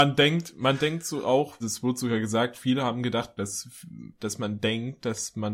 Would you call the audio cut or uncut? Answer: cut